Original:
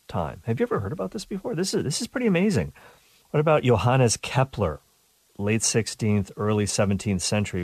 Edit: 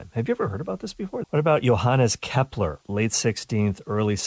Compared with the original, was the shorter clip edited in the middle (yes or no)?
yes